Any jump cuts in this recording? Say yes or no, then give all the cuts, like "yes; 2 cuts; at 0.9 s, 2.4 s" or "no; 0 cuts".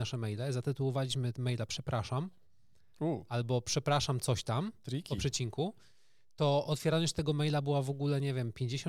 no; 0 cuts